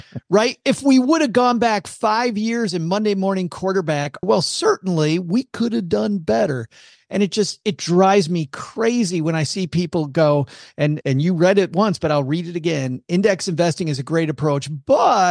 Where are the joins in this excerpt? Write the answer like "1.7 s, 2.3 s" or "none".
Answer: 4.2 s, 11.0 s